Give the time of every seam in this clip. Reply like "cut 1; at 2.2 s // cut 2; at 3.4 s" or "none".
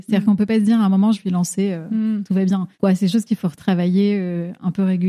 cut 1; at 1.1 s // cut 2; at 2.7 s